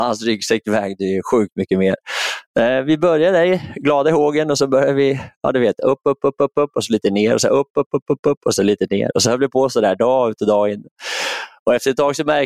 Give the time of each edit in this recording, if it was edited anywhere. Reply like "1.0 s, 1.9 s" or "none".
none